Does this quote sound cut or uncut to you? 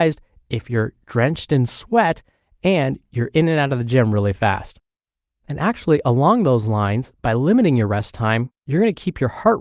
uncut